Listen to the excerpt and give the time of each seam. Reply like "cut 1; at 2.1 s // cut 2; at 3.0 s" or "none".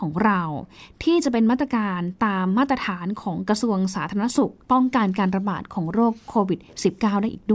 cut 1; at 4.6 s